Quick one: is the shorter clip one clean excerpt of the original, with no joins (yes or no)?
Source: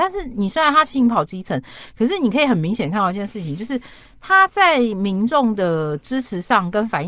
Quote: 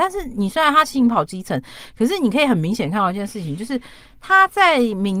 yes